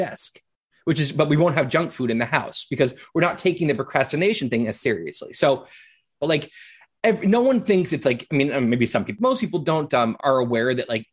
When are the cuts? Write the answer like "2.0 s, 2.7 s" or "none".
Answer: 6.2 s